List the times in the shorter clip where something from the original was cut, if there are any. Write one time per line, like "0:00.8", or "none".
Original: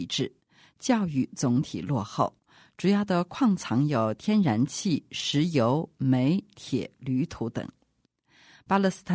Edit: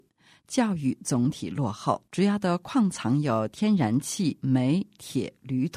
0:02.1
0:04.4